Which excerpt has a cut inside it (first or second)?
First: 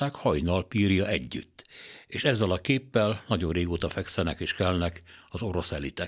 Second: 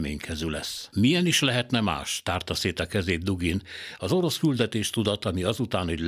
second